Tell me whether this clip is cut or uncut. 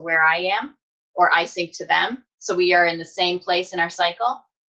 cut